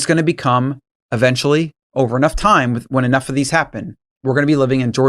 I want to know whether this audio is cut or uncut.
uncut